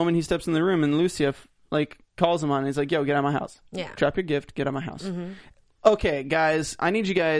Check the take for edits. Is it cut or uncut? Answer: uncut